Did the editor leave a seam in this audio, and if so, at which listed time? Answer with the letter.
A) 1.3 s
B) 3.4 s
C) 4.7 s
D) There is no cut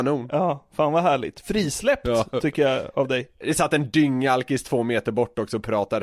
B